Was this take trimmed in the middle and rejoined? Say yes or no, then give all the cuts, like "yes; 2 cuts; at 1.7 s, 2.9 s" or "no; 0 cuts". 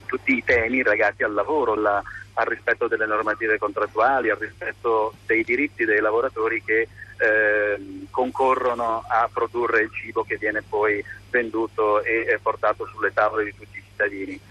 yes; 1 cut; at 1.8 s